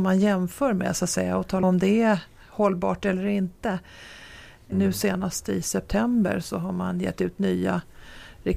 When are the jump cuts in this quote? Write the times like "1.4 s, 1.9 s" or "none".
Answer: 1.6 s, 4.7 s

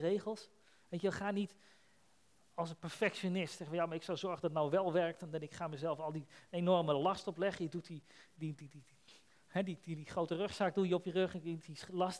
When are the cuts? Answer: none

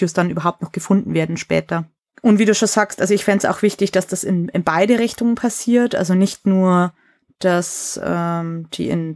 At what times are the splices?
none

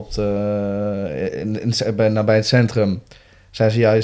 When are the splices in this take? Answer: none

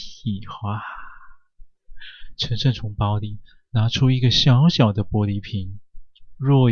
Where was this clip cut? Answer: none

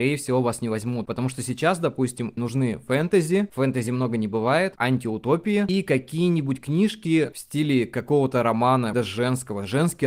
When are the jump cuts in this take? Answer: 2.4 s, 8.9 s

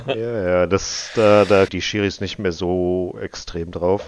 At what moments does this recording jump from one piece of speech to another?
1.7 s

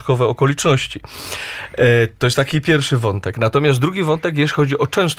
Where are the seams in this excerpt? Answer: none

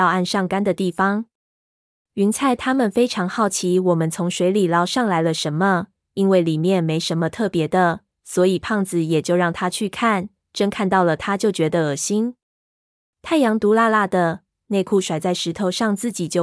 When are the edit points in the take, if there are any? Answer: none

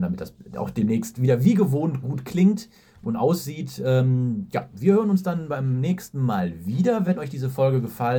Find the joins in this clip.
none

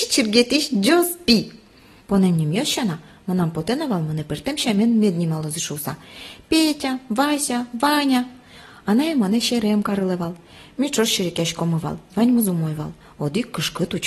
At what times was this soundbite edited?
none

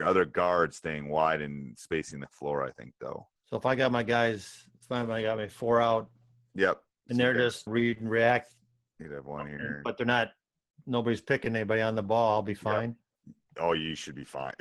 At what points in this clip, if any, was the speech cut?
3.4 s, 7.7 s

